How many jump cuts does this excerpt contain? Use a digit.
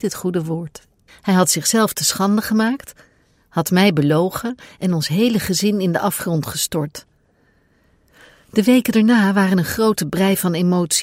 1